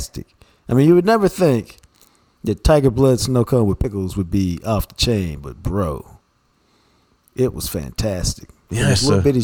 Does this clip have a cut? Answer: no; 0 cuts

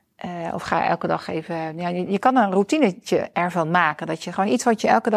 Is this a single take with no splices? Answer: yes; 0 cuts

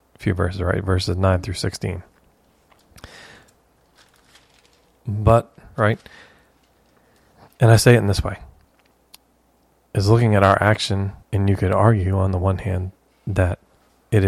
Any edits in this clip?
yes; 2 cuts; at 5.7 s, 11.2 s

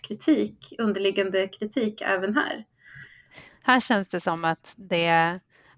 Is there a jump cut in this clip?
yes; 1 cut; at 3.5 s

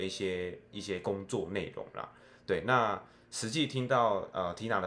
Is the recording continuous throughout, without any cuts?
yes; 0 cuts

